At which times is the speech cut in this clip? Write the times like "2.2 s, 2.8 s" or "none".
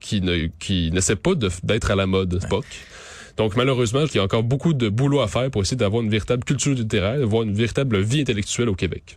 2.4 s, 4.1 s